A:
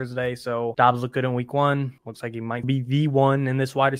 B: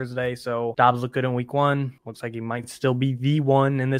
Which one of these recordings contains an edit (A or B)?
A